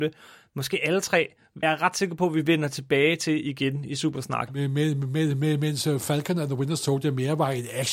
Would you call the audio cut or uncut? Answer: cut